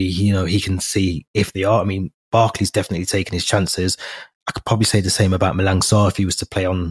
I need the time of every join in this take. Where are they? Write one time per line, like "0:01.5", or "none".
none